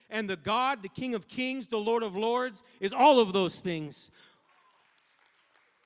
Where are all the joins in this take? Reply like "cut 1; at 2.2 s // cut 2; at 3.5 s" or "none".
none